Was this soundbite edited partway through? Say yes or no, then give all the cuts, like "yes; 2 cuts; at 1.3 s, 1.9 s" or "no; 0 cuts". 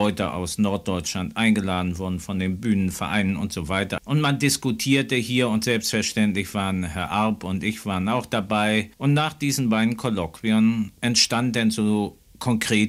yes; 1 cut; at 8.9 s